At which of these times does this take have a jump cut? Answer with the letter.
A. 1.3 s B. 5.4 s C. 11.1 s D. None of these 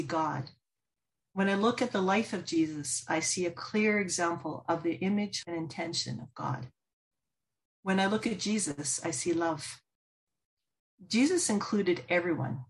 B